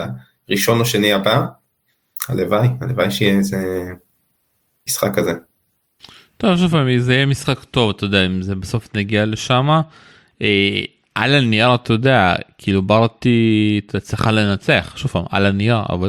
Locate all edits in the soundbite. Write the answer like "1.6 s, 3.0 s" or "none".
none